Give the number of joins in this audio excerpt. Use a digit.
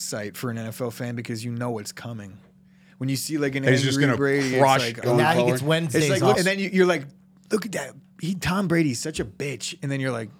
2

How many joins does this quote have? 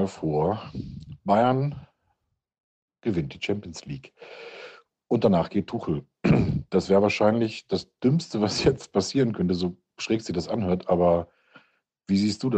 0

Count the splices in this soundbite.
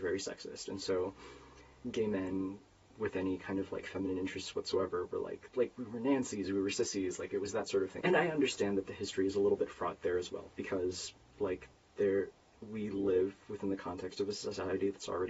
1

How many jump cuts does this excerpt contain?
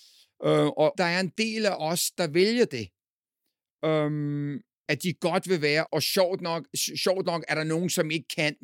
2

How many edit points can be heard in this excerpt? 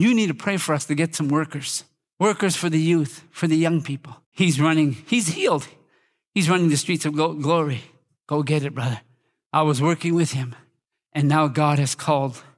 2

